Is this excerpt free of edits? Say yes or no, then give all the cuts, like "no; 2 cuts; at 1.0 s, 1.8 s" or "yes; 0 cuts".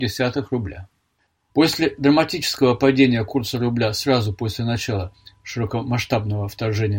no; 1 cut; at 1.5 s